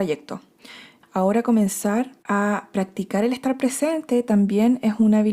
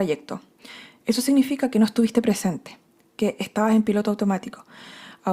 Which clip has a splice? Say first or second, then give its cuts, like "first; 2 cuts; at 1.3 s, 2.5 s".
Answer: first; 2 cuts; at 1.0 s, 2.2 s